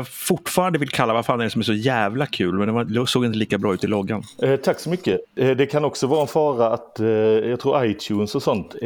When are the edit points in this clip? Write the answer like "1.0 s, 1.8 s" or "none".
none

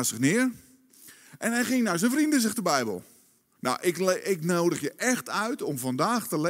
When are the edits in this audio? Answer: 3.6 s

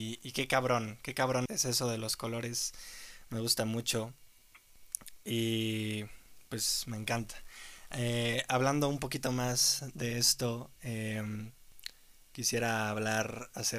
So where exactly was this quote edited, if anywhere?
1.5 s

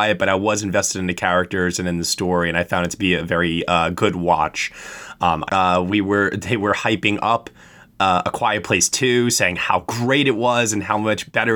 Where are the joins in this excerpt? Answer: 5.5 s

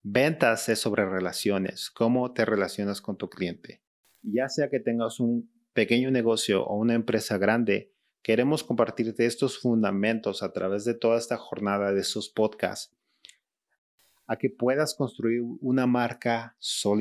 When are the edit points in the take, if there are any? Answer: none

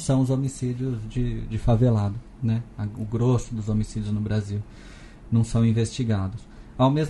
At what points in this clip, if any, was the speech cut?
none

